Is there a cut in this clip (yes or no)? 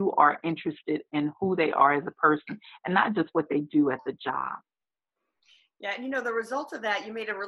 no